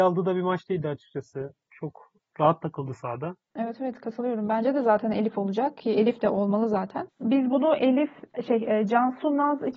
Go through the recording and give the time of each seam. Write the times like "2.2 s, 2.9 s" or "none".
1.7 s